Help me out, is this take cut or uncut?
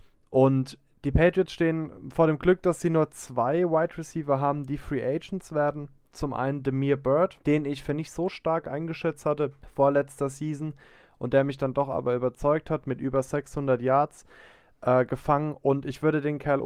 uncut